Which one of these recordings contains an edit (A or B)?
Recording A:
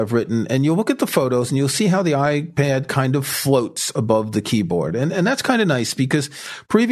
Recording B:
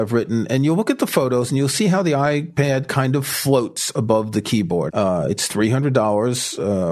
B